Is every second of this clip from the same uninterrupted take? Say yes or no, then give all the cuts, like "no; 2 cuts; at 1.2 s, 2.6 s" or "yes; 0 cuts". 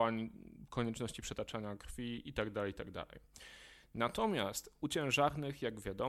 yes; 0 cuts